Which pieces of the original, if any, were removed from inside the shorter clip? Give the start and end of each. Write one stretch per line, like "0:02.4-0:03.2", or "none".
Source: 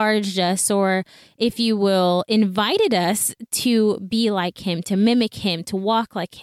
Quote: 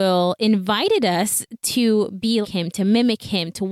0:04.3-0:04.5